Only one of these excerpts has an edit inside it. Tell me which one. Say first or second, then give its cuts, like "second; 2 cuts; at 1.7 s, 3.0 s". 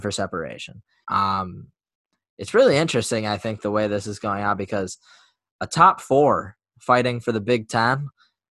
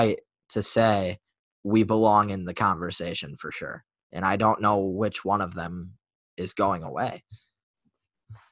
first; 1 cut; at 1.0 s